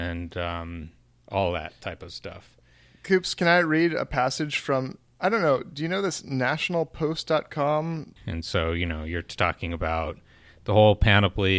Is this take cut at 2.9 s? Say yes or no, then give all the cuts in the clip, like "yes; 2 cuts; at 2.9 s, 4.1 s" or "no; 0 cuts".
no; 2 cuts; at 8.2 s, 9.4 s